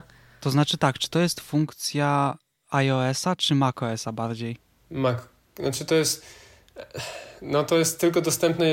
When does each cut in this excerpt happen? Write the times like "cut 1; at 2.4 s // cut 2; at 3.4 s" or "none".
none

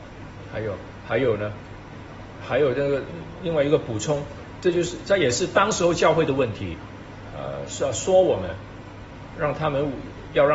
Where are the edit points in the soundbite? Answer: cut 1; at 4.6 s // cut 2; at 7.3 s

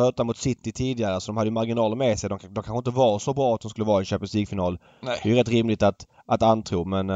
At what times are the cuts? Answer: none

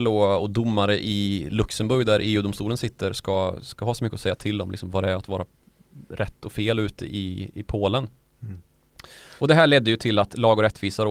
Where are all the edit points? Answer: cut 1; at 9.4 s

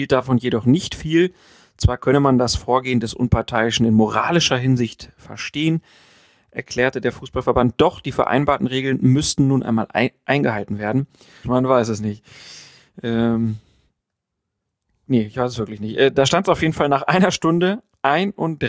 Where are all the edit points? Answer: cut 1; at 11.4 s

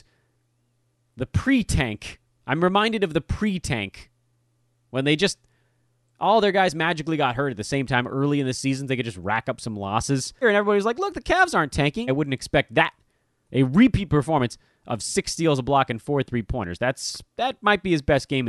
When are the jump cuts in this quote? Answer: cut 1; at 10.4 s // cut 2; at 12.1 s

